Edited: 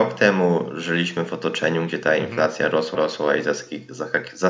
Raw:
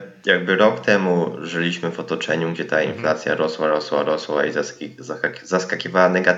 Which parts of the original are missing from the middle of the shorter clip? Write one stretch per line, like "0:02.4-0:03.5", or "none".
0:03.6-0:04.0